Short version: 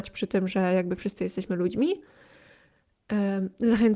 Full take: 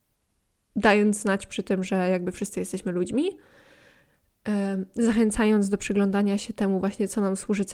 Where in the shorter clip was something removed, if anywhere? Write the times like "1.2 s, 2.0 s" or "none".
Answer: none